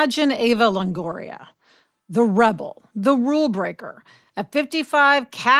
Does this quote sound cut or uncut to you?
uncut